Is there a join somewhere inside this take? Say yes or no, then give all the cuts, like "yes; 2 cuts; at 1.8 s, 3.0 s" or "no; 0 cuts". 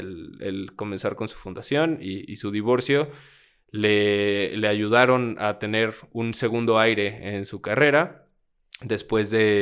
no; 0 cuts